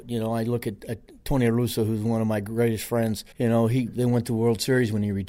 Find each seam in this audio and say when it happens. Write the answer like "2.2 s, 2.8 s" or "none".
3.3 s